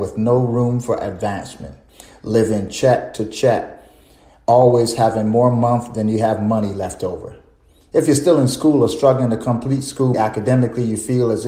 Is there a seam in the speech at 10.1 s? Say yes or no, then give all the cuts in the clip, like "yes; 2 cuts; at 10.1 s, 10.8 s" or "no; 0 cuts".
yes; 1 cut; at 10.1 s